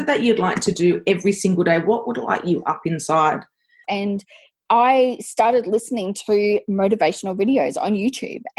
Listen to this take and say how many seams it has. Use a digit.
1